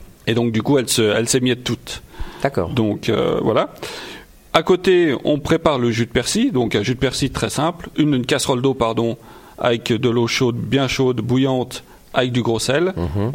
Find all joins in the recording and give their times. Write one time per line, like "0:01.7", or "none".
0:07.9